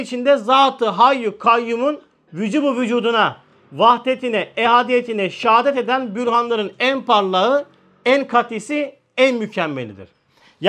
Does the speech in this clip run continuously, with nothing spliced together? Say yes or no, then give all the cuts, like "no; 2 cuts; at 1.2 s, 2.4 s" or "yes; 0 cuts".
yes; 0 cuts